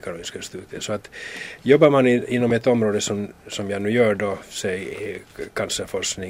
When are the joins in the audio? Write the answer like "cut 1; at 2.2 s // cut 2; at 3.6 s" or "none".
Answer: none